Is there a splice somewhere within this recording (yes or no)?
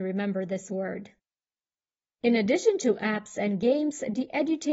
yes